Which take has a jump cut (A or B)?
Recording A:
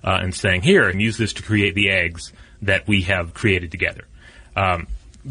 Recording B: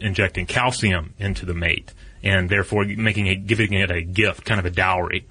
A